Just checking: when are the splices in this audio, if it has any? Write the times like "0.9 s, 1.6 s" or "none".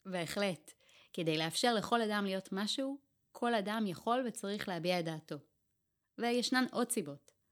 none